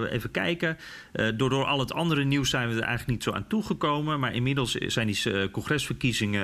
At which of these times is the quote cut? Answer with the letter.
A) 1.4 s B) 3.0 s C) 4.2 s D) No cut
D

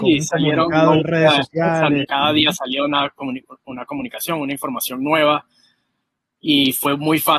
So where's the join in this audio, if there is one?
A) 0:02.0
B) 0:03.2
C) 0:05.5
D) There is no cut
A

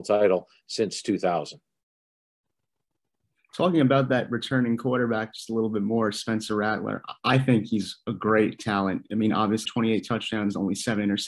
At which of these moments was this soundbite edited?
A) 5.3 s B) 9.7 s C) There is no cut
B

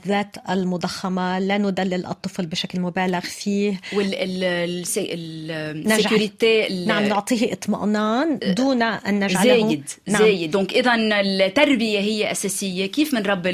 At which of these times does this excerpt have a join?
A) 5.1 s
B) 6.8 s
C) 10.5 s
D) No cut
C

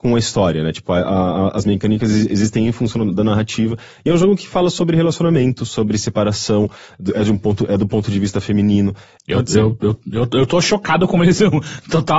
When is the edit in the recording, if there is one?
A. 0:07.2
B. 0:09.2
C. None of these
B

